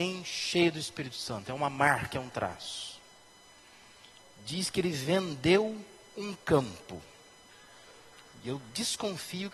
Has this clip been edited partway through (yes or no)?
no